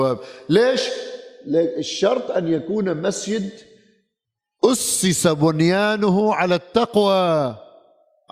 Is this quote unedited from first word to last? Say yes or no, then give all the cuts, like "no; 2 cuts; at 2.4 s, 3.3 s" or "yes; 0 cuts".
yes; 0 cuts